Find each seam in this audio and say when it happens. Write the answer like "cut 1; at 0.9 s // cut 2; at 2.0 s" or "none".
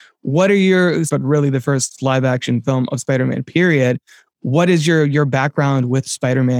cut 1; at 1.1 s